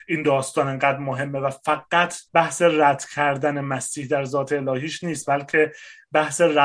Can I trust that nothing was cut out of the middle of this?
no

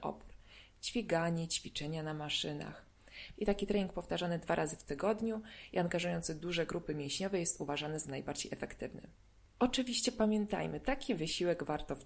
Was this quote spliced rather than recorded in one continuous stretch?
yes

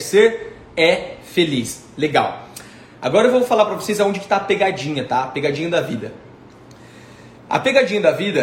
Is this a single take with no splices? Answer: no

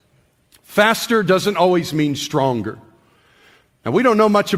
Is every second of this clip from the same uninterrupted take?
yes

